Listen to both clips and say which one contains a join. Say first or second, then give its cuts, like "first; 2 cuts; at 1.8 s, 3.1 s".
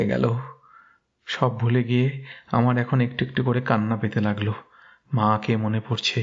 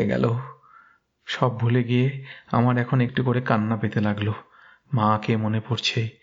second; 1 cut; at 3.1 s